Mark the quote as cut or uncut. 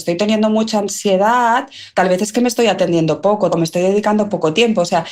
cut